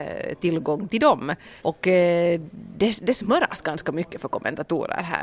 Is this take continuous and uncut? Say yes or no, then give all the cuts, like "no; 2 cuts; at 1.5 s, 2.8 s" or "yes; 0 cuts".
no; 1 cut; at 1.6 s